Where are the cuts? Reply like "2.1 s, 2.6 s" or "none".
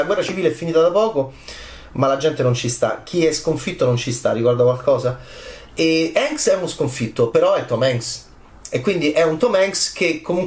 none